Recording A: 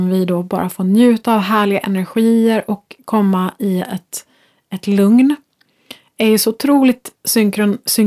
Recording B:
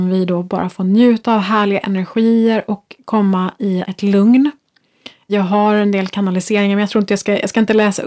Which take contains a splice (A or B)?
B